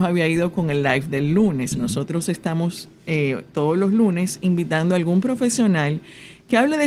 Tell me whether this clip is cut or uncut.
uncut